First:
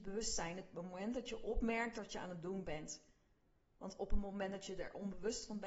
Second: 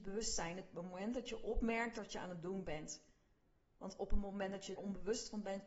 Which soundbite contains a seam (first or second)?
second